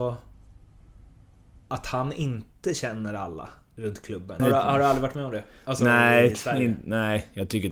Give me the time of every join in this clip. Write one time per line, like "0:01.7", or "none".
0:01.6
0:04.4